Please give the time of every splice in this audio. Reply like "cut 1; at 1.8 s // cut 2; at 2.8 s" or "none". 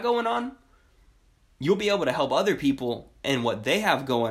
none